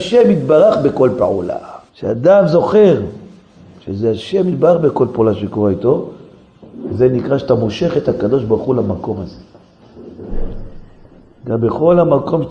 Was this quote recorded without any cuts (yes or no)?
no